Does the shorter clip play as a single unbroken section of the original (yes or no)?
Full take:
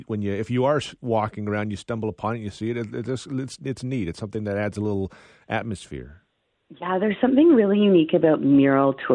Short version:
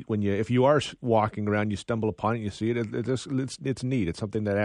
yes